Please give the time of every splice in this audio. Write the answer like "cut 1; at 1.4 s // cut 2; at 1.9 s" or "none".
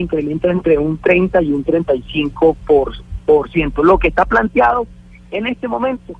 cut 1; at 3.2 s